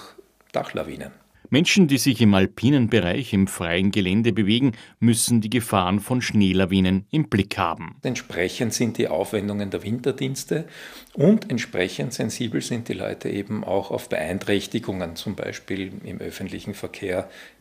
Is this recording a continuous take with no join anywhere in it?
no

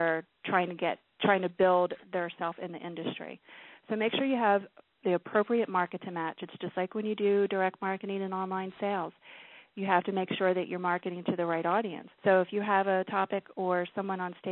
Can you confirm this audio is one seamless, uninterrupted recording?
no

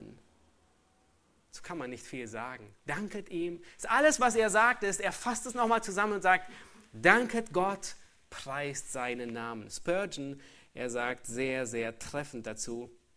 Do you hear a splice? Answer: no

